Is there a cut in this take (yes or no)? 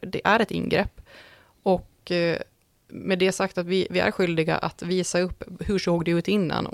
no